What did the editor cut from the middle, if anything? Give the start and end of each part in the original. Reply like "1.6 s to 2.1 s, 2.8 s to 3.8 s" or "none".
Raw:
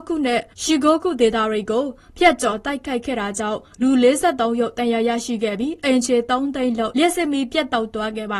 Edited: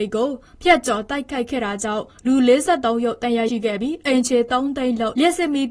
5.0 s to 5.3 s